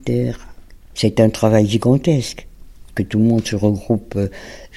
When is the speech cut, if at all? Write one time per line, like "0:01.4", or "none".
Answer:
0:00.9